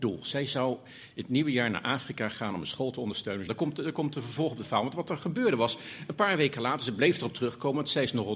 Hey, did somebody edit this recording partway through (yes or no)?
yes